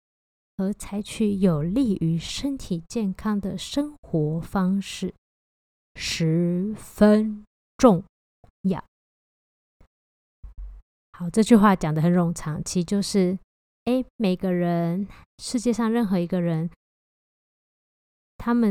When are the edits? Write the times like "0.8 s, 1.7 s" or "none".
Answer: none